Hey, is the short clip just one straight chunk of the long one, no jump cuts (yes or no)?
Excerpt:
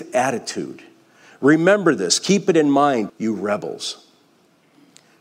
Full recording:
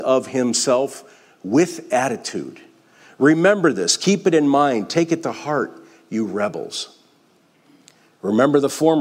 no